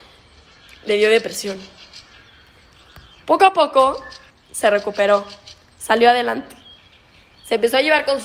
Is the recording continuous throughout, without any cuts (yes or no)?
no